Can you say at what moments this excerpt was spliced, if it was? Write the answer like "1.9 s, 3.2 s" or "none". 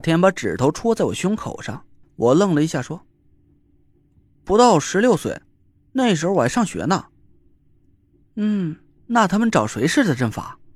2.0 s, 9.0 s